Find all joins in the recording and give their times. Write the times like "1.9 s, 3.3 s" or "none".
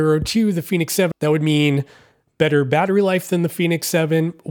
1.1 s